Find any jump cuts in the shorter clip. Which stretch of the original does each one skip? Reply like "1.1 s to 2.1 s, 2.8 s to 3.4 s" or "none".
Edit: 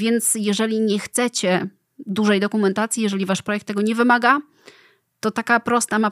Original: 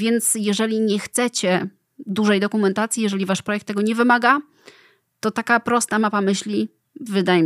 none